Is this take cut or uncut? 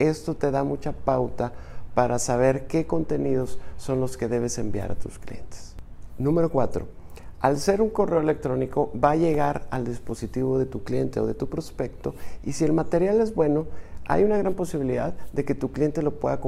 uncut